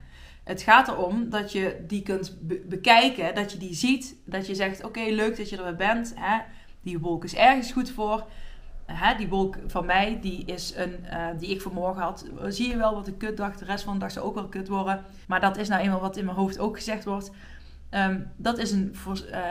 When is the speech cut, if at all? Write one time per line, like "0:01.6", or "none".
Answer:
0:15.2